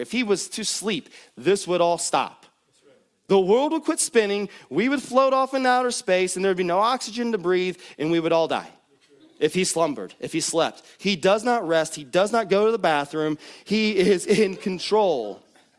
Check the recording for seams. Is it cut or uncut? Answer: uncut